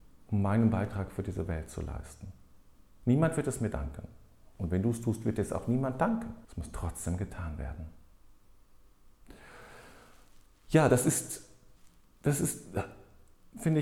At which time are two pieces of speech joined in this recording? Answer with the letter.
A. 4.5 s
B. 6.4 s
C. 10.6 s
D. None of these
B